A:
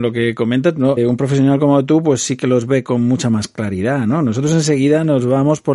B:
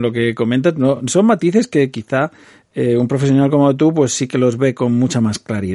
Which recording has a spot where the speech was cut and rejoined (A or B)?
A